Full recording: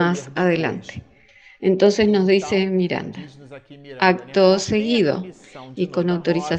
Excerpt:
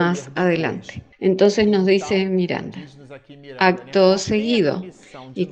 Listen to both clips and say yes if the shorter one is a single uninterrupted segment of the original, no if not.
no